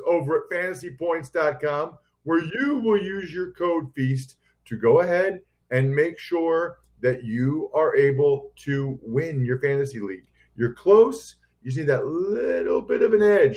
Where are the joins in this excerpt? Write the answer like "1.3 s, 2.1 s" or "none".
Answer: none